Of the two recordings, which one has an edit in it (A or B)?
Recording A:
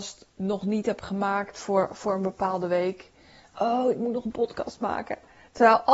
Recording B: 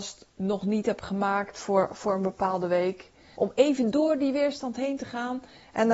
B